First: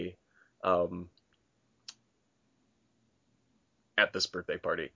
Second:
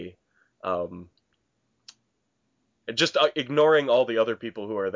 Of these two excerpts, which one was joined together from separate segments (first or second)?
second